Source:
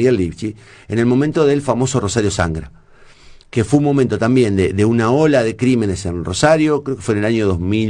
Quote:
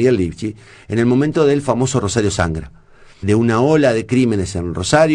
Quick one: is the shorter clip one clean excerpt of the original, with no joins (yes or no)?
no